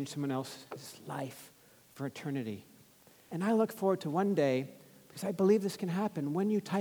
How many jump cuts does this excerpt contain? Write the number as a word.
one